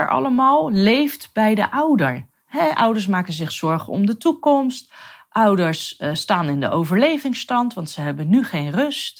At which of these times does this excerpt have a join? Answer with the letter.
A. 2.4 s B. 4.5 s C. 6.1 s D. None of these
D